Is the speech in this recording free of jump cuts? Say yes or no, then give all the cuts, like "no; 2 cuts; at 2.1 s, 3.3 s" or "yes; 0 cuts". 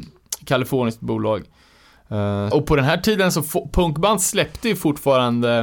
no; 1 cut; at 2.5 s